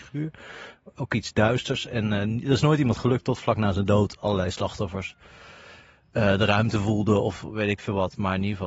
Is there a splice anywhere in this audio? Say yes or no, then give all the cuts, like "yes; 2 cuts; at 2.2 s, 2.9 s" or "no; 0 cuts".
no; 0 cuts